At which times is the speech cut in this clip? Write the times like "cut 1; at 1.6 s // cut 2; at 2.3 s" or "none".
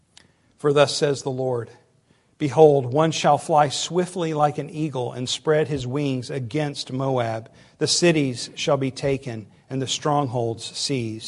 none